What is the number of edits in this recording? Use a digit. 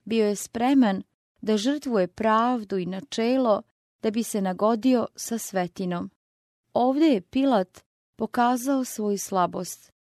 1